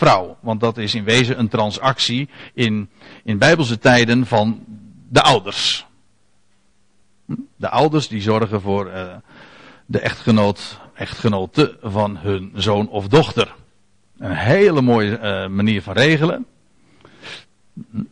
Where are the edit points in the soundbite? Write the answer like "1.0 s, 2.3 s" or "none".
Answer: none